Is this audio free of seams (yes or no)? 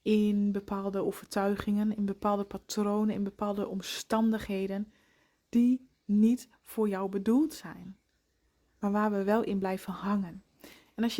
yes